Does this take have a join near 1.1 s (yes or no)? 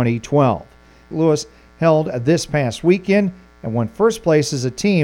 yes